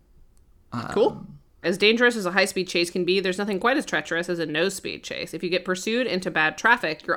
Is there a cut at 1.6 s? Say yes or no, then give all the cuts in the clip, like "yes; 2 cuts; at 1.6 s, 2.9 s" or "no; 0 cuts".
yes; 1 cut; at 1.6 s